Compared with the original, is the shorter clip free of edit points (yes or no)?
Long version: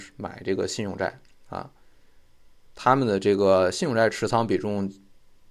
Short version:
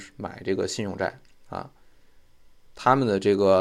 yes